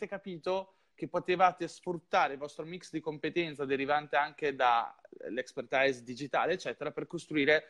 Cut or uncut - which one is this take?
uncut